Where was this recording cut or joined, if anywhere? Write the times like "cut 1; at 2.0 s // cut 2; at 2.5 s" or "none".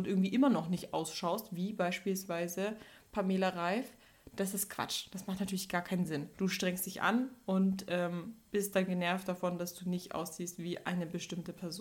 none